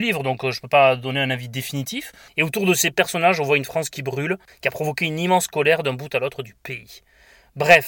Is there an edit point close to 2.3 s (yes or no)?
yes